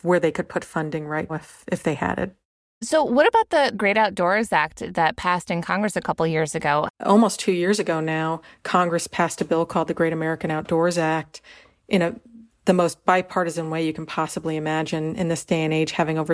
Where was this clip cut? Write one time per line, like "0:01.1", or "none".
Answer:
0:01.3
0:06.9